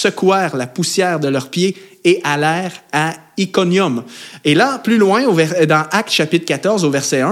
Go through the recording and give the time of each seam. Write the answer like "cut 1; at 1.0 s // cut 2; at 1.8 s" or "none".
none